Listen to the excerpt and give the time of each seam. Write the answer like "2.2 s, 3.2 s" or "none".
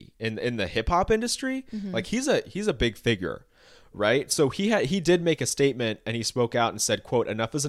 none